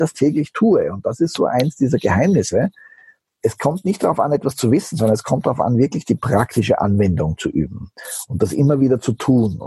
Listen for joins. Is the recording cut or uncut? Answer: uncut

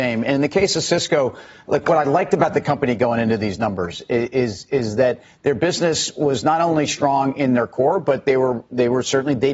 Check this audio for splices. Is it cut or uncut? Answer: uncut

